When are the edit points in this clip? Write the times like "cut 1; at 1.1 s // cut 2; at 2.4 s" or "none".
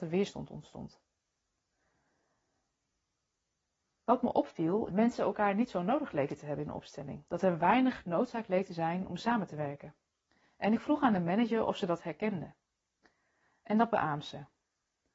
cut 1; at 4.9 s